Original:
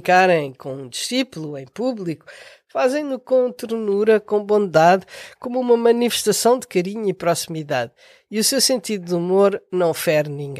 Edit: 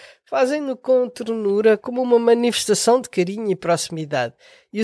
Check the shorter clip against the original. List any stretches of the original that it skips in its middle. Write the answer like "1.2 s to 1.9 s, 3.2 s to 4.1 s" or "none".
4.2 s to 5.4 s